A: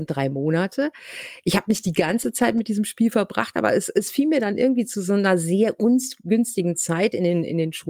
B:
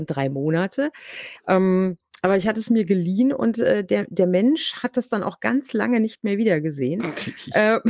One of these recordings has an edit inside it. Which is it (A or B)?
B